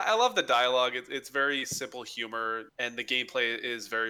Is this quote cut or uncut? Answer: cut